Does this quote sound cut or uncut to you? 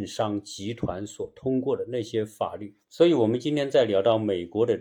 cut